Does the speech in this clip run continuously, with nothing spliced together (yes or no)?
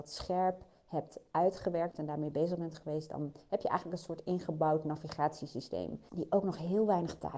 no